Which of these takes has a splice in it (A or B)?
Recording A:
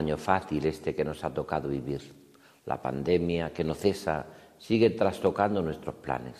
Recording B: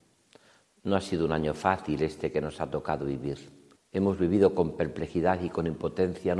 B